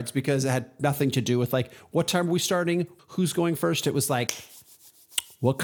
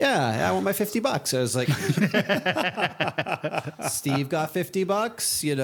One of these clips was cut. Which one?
first; 1 cut; at 3.0 s

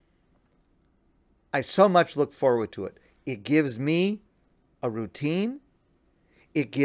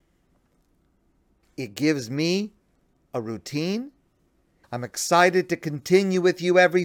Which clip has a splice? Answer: second; 2 cuts; at 1.4 s, 4.6 s

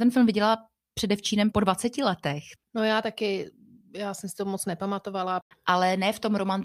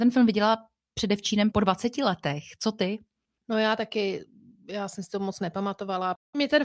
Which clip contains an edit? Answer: first; 2 cuts; at 2.6 s, 5.5 s

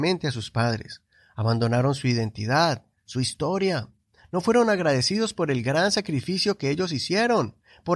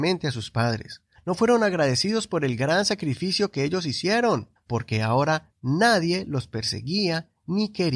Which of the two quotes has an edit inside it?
second; 2 cuts; at 1.1 s, 4.6 s

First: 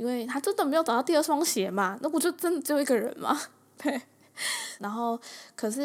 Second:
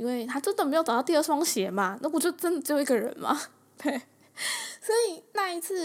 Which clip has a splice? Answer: first; 1 cut; at 4.8 s

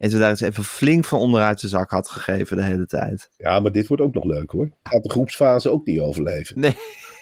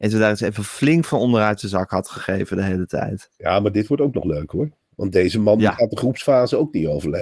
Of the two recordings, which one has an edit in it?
first; 1 cut; at 4.9 s

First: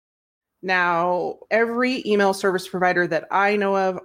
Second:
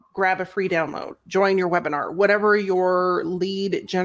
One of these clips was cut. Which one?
first; 1 cut; at 1.4 s

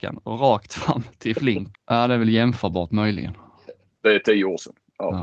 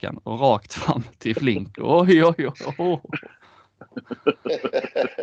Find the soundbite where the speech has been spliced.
first; 1 cut; at 1.7 s

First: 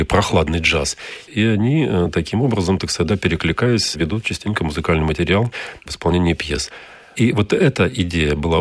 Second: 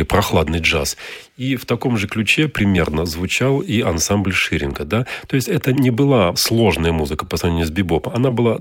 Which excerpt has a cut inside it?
first; 1 cut; at 1.3 s

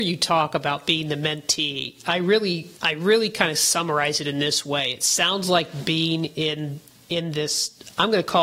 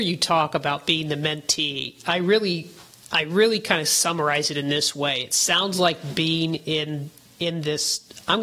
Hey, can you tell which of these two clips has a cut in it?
first; 1 cut; at 2.8 s

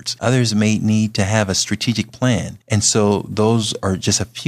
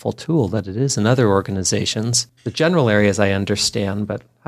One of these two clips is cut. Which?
second; 1 cut; at 2.4 s

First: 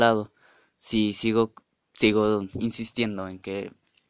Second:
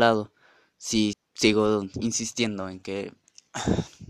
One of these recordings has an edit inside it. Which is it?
second; 1 cut; at 1.1 s

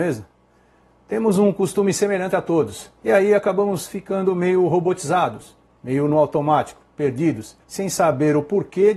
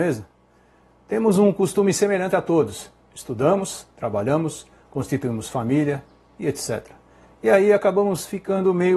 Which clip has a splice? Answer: first; 2 cuts; at 3.0 s, 7.6 s

